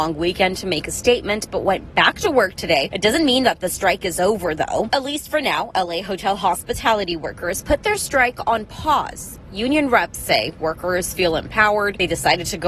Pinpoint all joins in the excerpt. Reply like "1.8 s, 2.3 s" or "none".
4.9 s